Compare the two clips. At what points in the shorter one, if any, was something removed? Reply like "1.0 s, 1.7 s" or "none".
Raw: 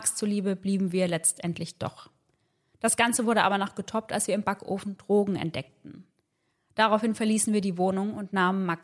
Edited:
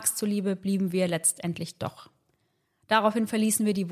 2.6 s